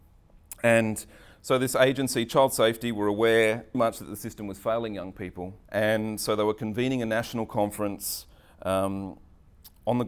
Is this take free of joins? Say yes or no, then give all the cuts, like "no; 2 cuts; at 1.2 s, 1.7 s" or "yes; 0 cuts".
no; 2 cuts; at 3.7 s, 5.6 s